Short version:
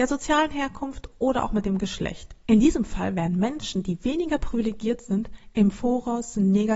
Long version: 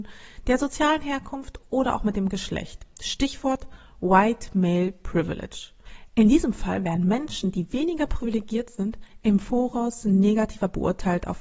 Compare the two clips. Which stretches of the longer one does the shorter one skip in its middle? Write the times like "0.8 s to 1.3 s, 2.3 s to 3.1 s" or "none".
2.9 s to 6.1 s